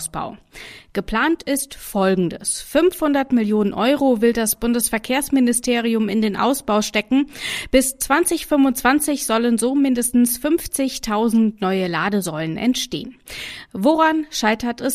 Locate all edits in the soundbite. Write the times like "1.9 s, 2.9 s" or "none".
none